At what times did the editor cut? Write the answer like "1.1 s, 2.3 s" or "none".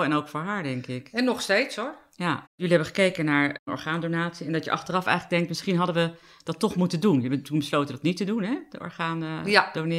2.5 s